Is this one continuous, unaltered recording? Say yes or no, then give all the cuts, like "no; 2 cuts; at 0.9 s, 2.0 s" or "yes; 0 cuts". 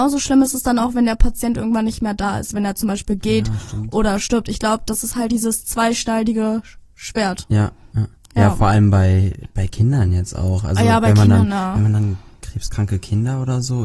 no; 1 cut; at 5.3 s